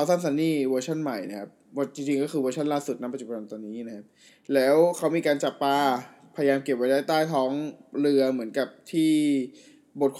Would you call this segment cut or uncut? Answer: uncut